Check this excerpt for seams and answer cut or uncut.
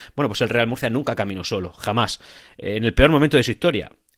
uncut